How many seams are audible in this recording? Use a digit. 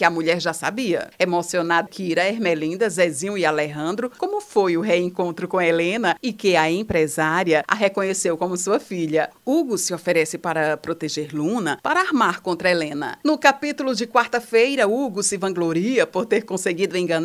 1